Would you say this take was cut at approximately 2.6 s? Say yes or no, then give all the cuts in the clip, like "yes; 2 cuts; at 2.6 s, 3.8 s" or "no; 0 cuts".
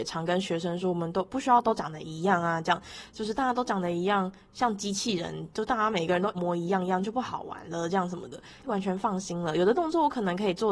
no; 2 cuts; at 6.3 s, 8.6 s